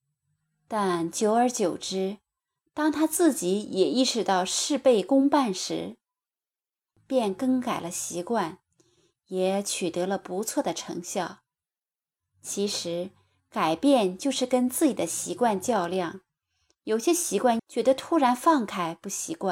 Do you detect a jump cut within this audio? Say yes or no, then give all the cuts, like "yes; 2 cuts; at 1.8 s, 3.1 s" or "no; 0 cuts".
yes; 1 cut; at 17.6 s